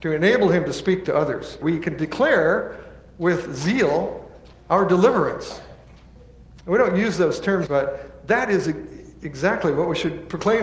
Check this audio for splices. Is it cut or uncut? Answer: cut